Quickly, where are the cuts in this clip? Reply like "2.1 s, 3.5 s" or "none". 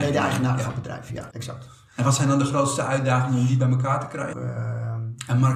1.3 s, 4.3 s